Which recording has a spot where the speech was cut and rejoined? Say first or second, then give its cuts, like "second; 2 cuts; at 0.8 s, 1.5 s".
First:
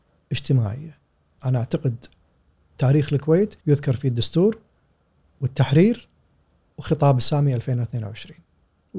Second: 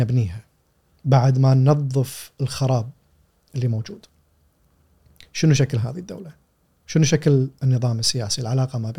first; 2 cuts; at 1.4 s, 3.6 s